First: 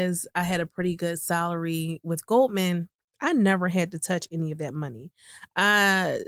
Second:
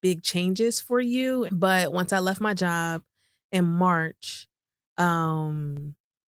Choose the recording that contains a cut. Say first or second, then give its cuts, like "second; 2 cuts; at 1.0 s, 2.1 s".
second; 1 cut; at 1.5 s